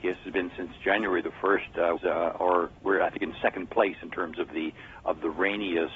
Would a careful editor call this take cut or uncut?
cut